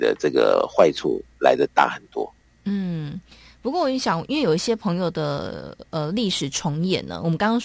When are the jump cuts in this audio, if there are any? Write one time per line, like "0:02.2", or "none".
none